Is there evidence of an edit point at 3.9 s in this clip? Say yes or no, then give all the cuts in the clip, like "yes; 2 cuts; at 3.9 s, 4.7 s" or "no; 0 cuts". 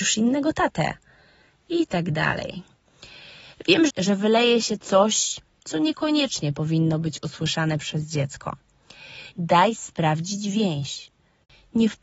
yes; 2 cuts; at 3.9 s, 9.3 s